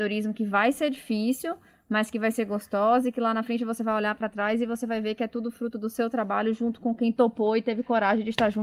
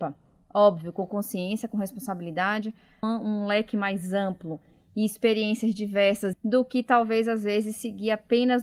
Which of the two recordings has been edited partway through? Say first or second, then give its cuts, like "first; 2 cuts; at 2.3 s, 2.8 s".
second; 2 cuts; at 3.0 s, 6.3 s